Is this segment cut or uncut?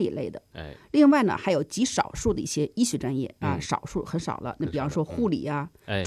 uncut